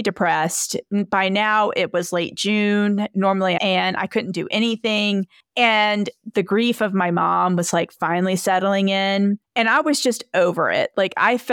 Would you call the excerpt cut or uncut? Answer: cut